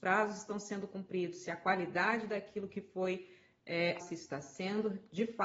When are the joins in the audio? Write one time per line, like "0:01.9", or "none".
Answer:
0:04.0